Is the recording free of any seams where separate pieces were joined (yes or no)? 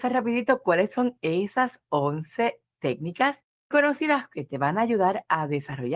no